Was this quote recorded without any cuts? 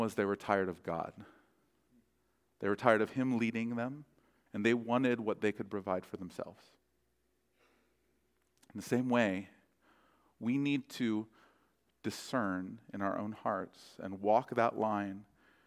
no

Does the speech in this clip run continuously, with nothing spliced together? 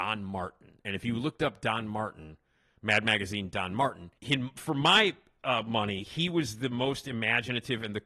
no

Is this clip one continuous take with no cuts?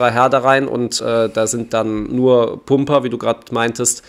yes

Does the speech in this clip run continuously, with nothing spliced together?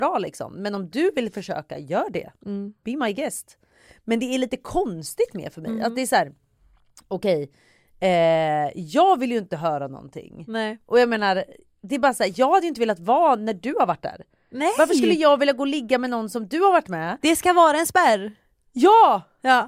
yes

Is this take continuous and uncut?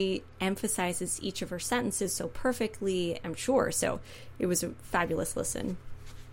no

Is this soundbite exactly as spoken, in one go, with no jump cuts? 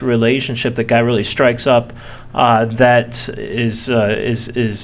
yes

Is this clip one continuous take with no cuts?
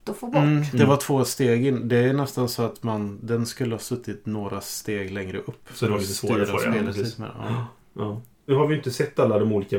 no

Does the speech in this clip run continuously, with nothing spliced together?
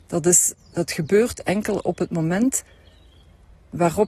yes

